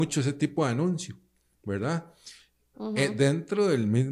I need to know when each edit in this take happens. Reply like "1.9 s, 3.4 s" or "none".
2.7 s